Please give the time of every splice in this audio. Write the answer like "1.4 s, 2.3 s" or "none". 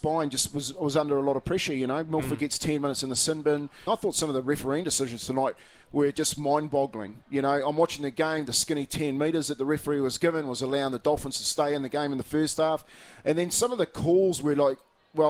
3.9 s